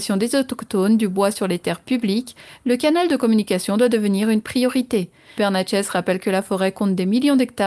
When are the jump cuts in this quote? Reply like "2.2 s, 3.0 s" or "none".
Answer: 5.4 s